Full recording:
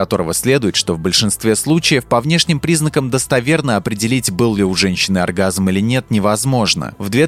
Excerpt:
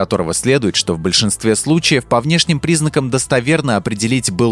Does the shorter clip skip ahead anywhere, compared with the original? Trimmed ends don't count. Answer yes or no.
no